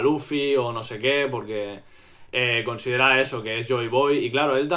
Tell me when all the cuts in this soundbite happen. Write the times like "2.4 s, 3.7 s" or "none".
none